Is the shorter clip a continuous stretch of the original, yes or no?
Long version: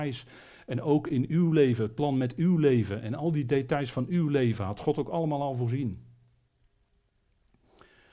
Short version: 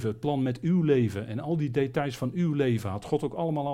yes